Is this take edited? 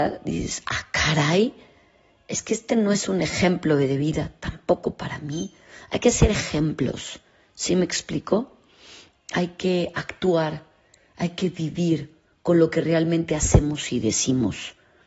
no; 0 cuts

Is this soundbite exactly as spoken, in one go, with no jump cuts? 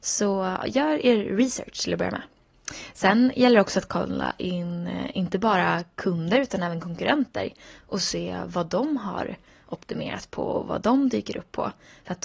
yes; 0 cuts

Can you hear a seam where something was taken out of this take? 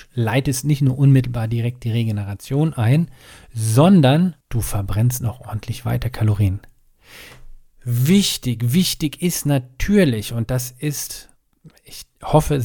yes; 1 cut; at 4.4 s

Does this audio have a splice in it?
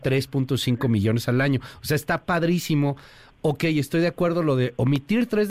no; 0 cuts

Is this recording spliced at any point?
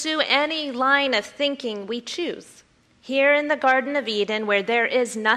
yes; 1 cut; at 2.8 s

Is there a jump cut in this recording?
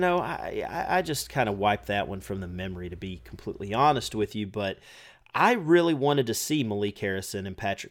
no; 0 cuts

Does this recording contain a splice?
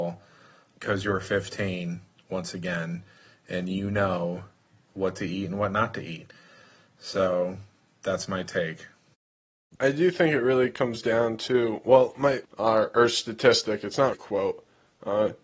yes; 2 cuts; at 12.4 s, 14.1 s

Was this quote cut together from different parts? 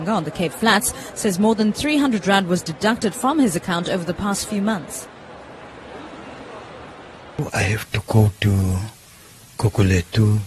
yes; 1 cut; at 7.5 s

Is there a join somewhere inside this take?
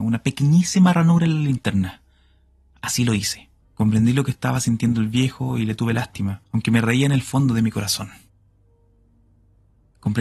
yes; 2 cuts; at 3.6 s, 6.4 s

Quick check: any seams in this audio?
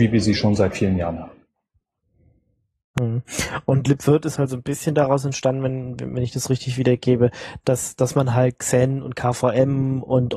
no; 0 cuts

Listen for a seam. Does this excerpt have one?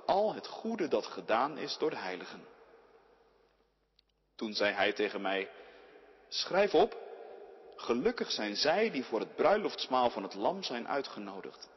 no; 0 cuts

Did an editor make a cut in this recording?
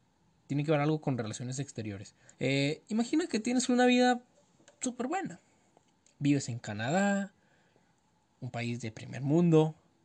yes; 1 cut; at 2.3 s

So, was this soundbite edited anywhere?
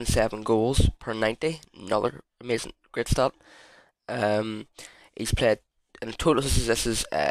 no; 0 cuts

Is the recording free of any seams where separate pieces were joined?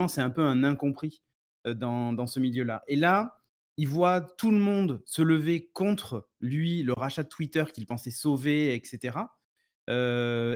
yes; 0 cuts

